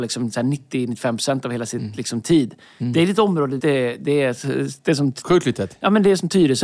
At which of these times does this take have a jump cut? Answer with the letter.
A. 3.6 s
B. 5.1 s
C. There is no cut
A